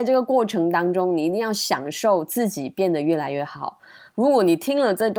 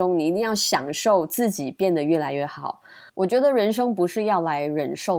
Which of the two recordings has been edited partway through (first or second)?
second